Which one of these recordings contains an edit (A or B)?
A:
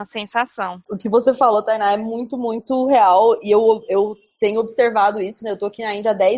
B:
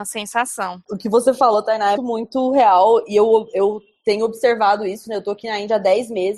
B